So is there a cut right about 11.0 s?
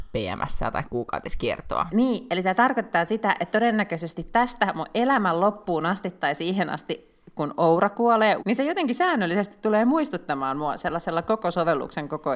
no; 2 cuts; at 1.9 s, 8.4 s

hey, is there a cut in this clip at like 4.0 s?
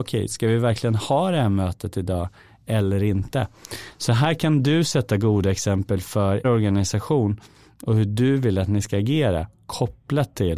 no; 1 cut; at 6.4 s

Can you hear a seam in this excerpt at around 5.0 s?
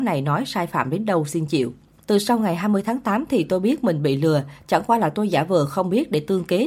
no; 1 cut; at 2.0 s

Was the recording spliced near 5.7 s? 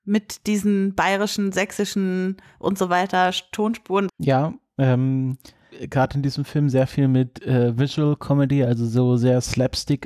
yes; 2 cuts; at 4.1 s, 5.7 s

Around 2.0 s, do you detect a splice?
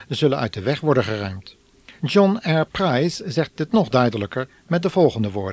yes; 1 cut; at 2.0 s

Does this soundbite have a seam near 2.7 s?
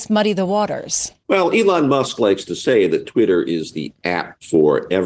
no; 1 cut; at 1.2 s

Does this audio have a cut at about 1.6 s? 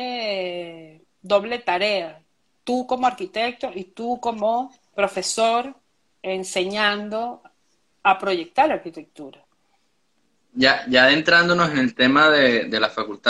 no; 1 cut; at 4.9 s

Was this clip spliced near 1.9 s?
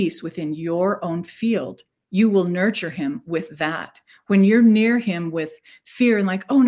yes; 1 cut; at 1.9 s

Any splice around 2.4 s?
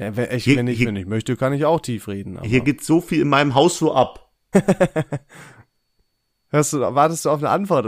no; 1 cut; at 4.5 s

